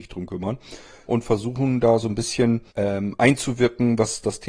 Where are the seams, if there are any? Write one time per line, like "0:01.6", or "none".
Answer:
0:01.1
0:02.7